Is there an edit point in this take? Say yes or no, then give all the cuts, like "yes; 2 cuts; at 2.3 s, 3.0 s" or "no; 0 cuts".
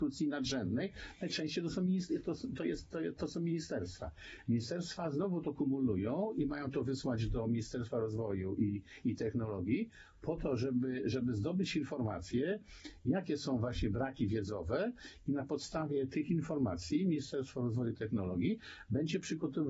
no; 0 cuts